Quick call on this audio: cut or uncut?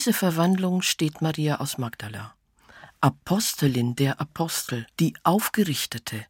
cut